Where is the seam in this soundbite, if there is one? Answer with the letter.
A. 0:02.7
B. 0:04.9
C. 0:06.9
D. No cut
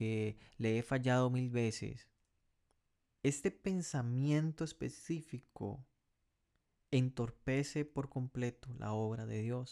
D